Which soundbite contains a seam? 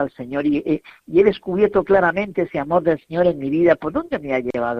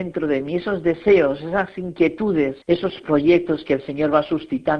second; 1 cut; at 2.6 s

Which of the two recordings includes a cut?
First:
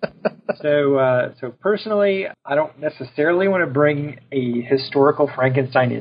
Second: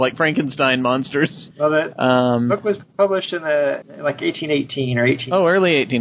second; 1 cut; at 1.5 s

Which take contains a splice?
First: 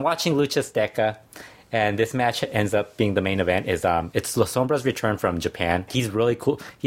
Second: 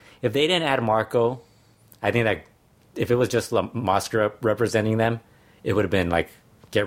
first; 1 cut; at 5.9 s

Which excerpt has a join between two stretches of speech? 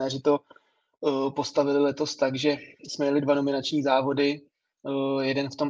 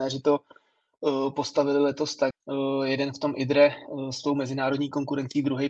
second; 1 cut; at 2.3 s

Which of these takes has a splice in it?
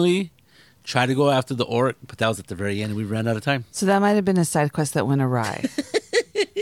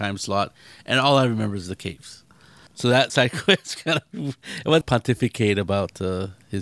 second; 2 cuts; at 2.7 s, 4.8 s

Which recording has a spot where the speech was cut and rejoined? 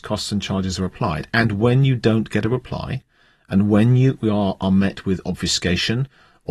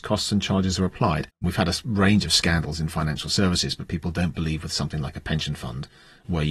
second; 1 cut; at 1.3 s

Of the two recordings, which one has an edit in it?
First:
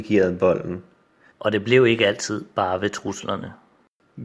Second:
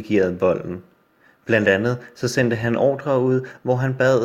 first; 1 cut; at 1.3 s

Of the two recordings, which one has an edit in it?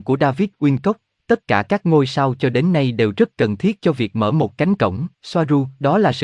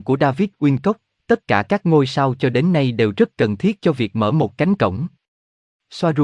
first; 1 cut; at 5.1 s

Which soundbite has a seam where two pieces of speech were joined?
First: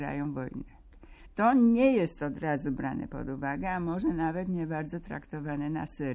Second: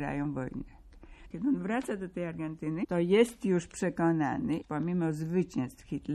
second; 1 cut; at 1.3 s

